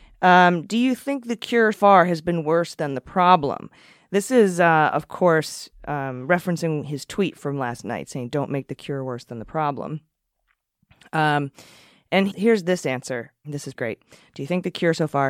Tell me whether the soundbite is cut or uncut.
cut